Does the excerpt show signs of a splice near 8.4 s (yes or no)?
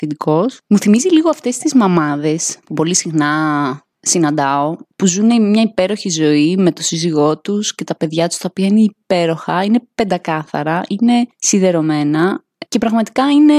no